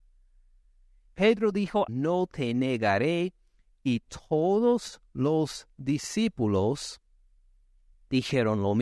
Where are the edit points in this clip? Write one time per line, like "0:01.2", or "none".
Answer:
0:01.9

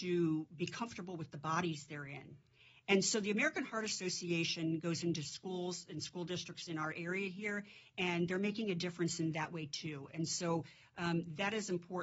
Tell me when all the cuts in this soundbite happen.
none

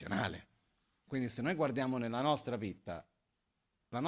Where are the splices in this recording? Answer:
0:01.1

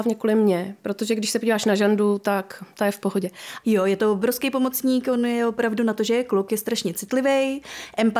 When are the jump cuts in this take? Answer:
0:03.6

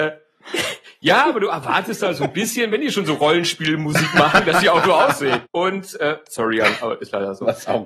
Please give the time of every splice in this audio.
0:05.4

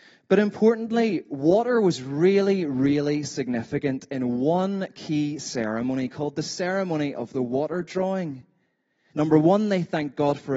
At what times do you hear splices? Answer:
0:09.1

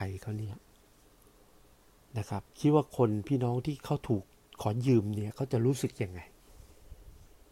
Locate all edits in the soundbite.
0:02.5

